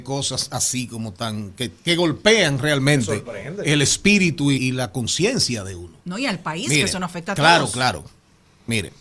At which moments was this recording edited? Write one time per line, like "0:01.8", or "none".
0:04.6